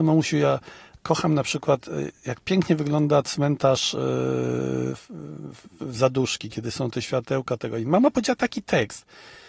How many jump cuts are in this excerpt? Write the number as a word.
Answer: zero